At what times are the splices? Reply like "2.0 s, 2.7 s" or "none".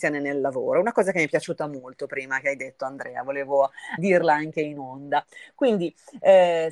4.0 s